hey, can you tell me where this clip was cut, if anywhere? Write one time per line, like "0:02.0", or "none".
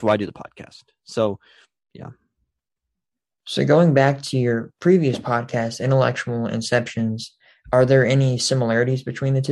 none